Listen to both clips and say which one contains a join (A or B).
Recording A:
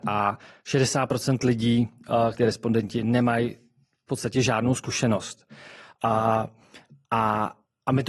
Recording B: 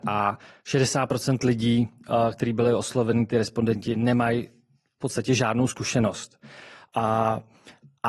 A